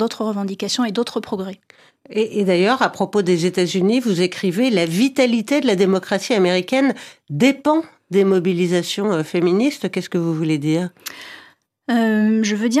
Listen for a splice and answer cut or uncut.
uncut